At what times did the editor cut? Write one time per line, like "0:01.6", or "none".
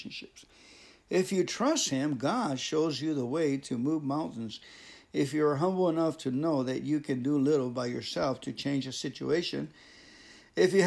none